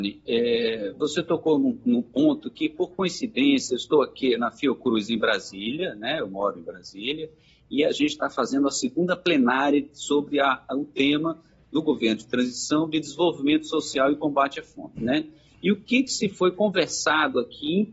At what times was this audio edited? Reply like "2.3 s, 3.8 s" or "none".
none

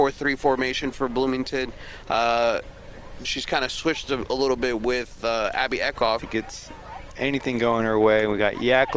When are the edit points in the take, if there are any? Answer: 3.2 s, 6.2 s

